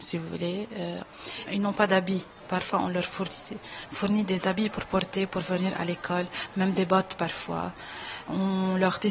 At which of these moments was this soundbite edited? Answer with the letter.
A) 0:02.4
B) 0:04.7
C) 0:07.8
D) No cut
B